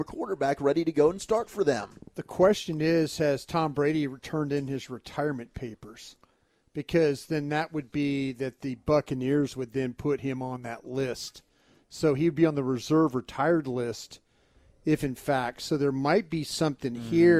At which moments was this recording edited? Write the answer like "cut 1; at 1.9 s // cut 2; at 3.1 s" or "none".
none

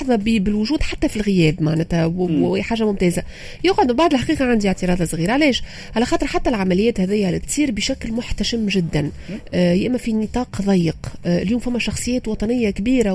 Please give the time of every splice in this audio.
cut 1; at 7.4 s

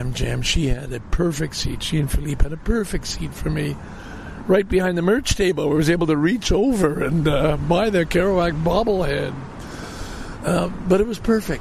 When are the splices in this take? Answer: none

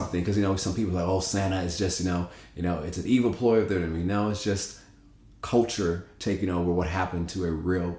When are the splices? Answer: none

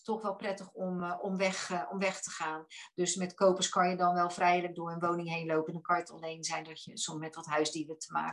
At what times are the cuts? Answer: none

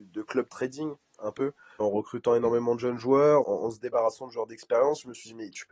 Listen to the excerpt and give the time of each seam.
cut 1; at 1.8 s // cut 2; at 3.4 s

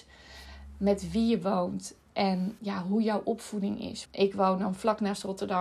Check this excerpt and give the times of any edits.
cut 1; at 2.6 s // cut 2; at 4.1 s

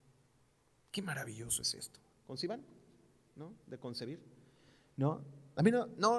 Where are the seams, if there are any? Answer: cut 1; at 2.1 s

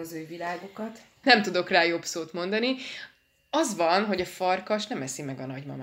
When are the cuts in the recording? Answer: cut 1; at 1.2 s

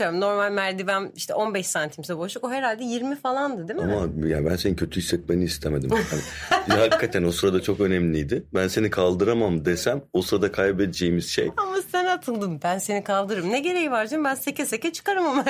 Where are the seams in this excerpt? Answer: none

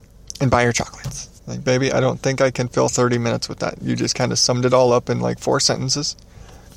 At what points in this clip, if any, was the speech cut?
cut 1; at 1.4 s

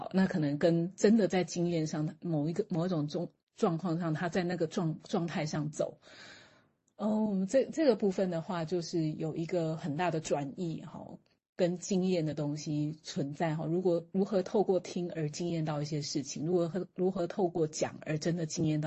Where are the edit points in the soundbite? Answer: none

